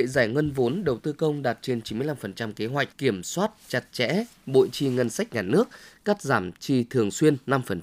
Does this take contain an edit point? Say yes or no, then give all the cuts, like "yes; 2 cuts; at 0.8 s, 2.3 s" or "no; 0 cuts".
yes; 2 cuts; at 2.9 s, 6.0 s